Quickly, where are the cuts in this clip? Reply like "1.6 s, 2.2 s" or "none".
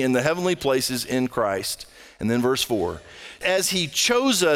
3.4 s